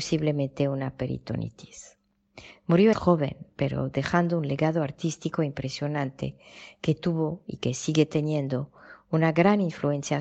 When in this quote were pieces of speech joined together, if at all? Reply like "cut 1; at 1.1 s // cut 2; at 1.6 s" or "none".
cut 1; at 2.9 s